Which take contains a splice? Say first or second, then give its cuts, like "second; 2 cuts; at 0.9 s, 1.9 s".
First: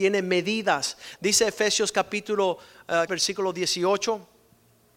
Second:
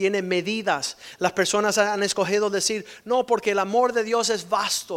first; 2 cuts; at 1.2 s, 3.1 s